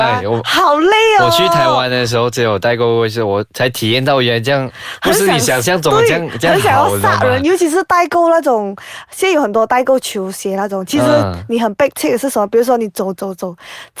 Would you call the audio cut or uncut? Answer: uncut